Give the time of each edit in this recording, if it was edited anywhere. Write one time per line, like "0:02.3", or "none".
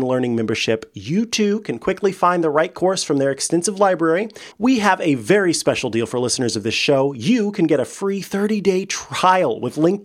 0:04.5